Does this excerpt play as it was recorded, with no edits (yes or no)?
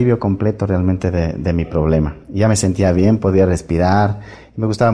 yes